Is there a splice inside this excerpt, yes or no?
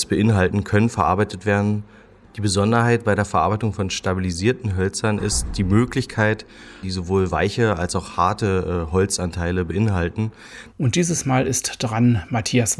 yes